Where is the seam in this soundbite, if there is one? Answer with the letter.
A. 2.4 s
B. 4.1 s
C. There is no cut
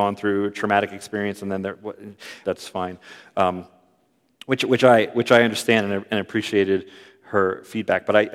A